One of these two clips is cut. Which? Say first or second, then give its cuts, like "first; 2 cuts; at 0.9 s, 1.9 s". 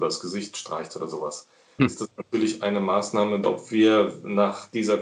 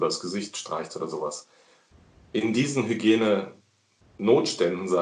first; 2 cuts; at 1.8 s, 3.4 s